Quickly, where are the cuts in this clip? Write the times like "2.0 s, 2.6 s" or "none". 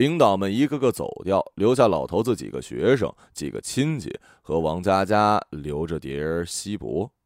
none